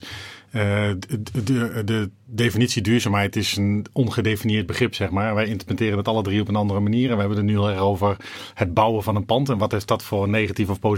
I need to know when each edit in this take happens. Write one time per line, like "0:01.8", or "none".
none